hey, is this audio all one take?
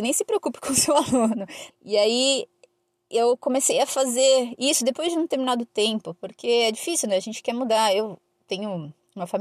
no; 1 cut; at 1.7 s

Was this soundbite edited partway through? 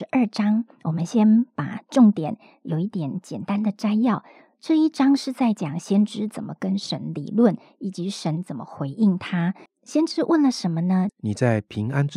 yes; 2 cuts; at 9.7 s, 11.1 s

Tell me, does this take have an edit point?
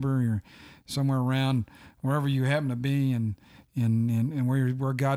no; 0 cuts

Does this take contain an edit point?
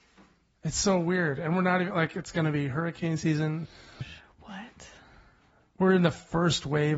yes; 1 cut; at 4.0 s

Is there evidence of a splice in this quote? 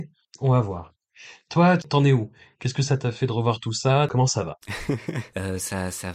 yes; 1 cut; at 4.6 s

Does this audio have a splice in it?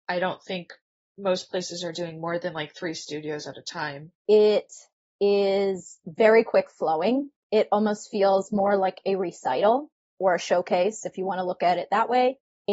yes; 1 cut; at 4.2 s

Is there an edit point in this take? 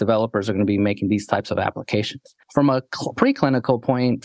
no; 0 cuts

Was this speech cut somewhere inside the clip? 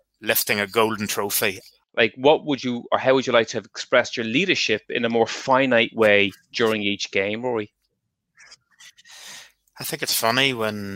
yes; 1 cut; at 1.8 s

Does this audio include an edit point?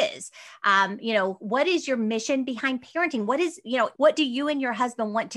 yes; 1 cut; at 3.9 s

